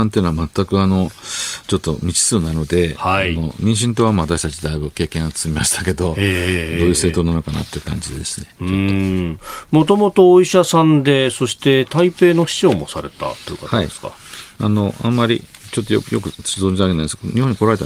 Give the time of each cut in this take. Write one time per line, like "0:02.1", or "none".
none